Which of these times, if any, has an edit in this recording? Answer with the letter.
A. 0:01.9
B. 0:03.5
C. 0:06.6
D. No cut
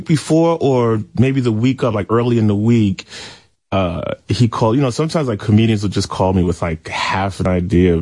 D